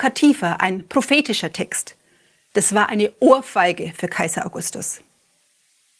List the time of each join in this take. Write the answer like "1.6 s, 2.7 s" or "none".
none